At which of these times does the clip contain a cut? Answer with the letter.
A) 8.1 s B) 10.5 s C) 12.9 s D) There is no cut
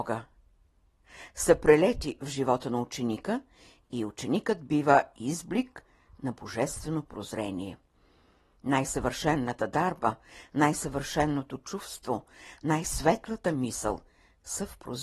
D